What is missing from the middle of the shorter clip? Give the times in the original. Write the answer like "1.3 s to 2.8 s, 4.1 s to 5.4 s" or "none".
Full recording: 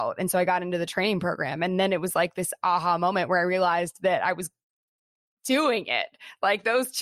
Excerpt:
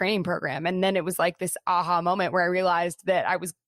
none